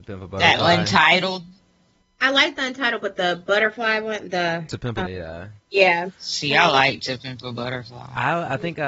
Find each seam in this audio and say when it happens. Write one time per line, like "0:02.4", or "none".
0:05.0